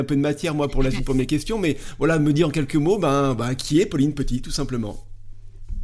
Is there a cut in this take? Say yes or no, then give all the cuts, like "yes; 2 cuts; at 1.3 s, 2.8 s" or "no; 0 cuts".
no; 0 cuts